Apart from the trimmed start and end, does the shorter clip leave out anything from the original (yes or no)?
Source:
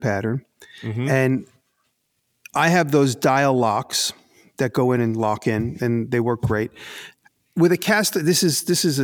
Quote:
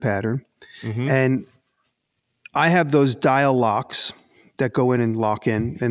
no